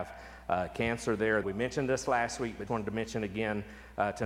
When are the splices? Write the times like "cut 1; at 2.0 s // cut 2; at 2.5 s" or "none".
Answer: cut 1; at 1.4 s // cut 2; at 2.7 s

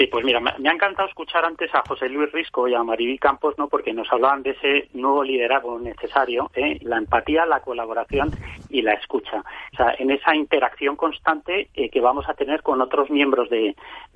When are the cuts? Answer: cut 1; at 6.8 s // cut 2; at 9.7 s

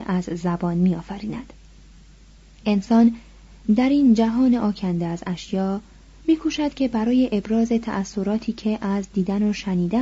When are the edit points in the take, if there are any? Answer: none

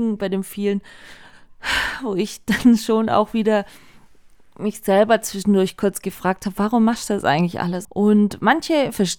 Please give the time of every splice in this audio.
cut 1; at 7.8 s

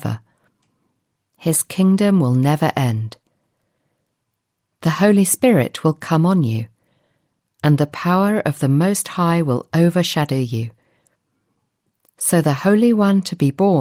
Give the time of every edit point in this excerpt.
none

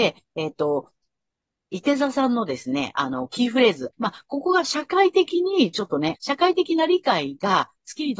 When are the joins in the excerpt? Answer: cut 1; at 3.9 s // cut 2; at 6.1 s

